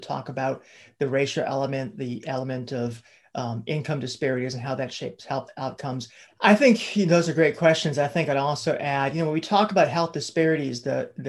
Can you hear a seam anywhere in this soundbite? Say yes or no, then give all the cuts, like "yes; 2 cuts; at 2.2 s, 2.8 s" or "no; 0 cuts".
yes; 1 cut; at 6.3 s